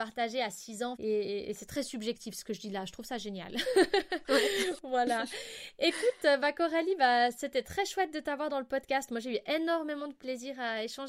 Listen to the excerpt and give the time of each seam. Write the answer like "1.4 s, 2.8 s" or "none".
0.9 s